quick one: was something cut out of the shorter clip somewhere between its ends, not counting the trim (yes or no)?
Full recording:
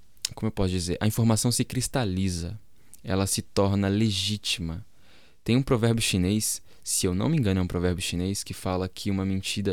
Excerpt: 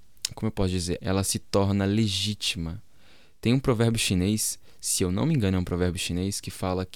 yes